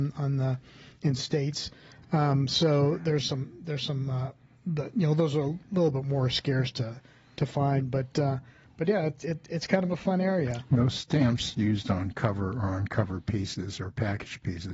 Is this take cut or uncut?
uncut